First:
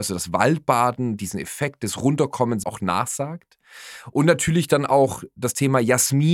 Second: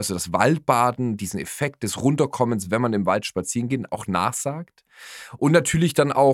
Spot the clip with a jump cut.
first; 1 cut; at 2.6 s

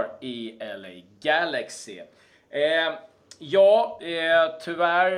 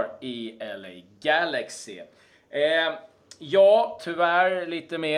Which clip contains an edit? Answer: second; 1 cut; at 4.0 s

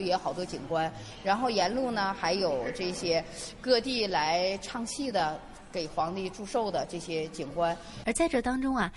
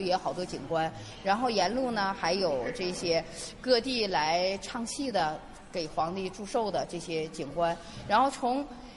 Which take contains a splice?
first; 1 cut; at 8.0 s

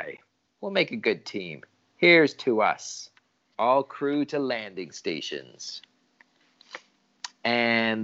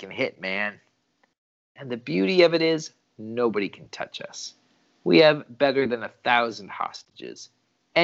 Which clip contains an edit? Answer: first; 1 cut; at 3.5 s

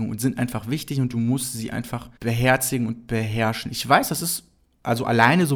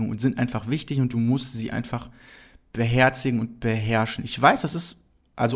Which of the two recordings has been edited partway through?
first; 1 cut; at 2.2 s

